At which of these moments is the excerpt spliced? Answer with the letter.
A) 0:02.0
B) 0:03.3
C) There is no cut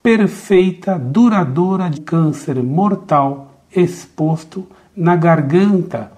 A